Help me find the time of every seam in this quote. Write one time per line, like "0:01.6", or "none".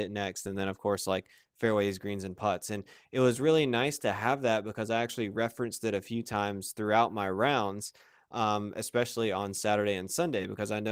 none